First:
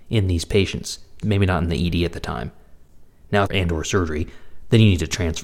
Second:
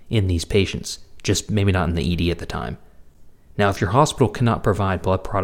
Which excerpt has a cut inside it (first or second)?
first